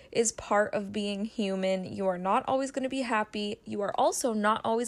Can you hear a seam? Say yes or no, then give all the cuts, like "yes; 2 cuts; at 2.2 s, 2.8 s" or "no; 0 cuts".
no; 0 cuts